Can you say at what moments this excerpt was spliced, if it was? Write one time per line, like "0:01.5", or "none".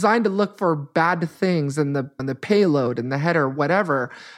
0:02.2